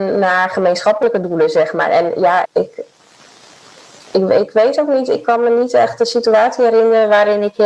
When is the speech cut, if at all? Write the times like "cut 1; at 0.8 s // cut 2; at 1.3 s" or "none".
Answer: cut 1; at 2.4 s